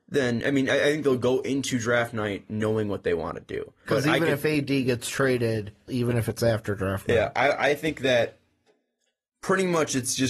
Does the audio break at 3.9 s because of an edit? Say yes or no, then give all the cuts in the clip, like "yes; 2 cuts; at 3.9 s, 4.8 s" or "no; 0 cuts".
yes; 2 cuts; at 3.9 s, 5.9 s